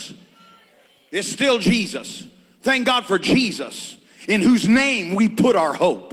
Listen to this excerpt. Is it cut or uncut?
uncut